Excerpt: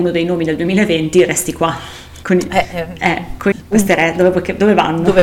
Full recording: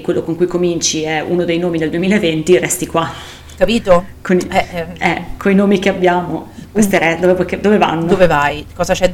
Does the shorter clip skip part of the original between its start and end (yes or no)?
yes